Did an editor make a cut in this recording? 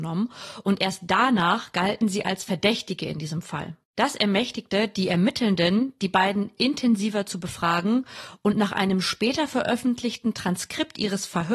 yes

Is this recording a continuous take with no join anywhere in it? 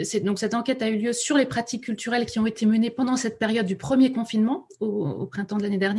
yes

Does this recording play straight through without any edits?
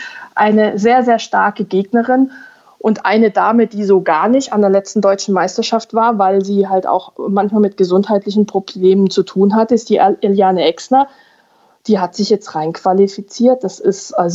yes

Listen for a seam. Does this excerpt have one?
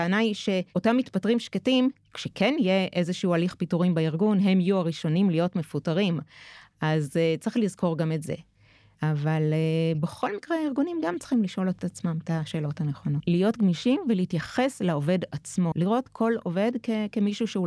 yes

